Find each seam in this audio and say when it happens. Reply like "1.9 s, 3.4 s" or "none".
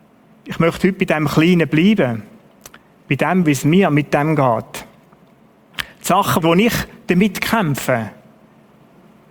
3.4 s, 6.4 s

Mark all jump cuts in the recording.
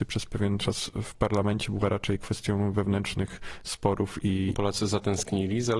4.5 s

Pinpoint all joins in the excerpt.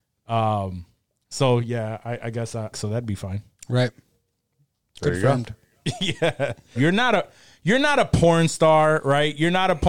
2.7 s, 6.7 s

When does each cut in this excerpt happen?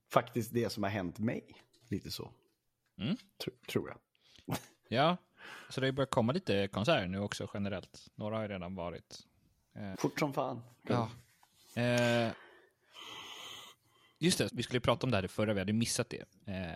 9.9 s, 14.5 s

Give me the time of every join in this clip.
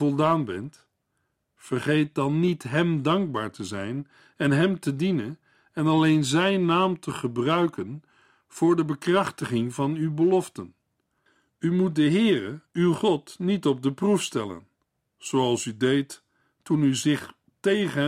none

